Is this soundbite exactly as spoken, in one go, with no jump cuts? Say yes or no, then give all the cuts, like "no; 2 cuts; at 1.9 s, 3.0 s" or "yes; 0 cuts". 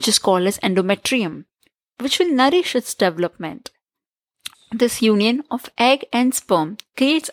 no; 1 cut; at 4.5 s